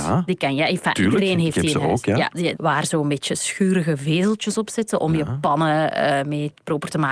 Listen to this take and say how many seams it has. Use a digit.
1